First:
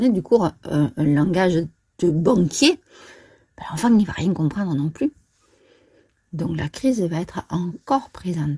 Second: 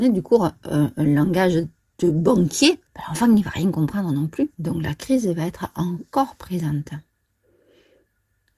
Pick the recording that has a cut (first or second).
second